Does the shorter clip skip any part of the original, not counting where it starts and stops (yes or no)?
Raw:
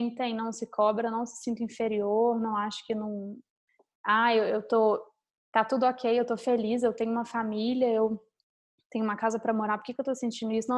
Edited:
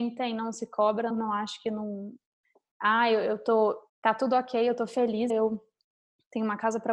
yes